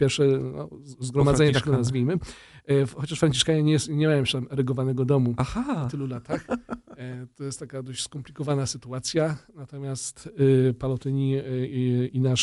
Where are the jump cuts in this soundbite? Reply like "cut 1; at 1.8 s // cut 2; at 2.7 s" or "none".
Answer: none